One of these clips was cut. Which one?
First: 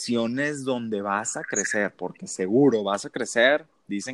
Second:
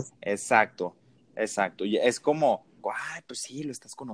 second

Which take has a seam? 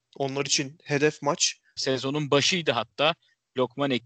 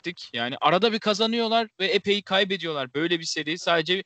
first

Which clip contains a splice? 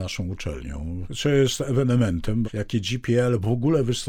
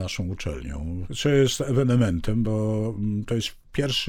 first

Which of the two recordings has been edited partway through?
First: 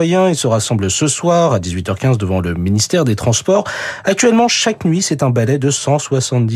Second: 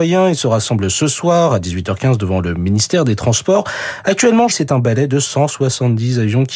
second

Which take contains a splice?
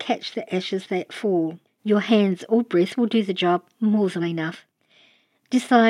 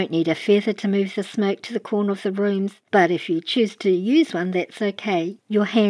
first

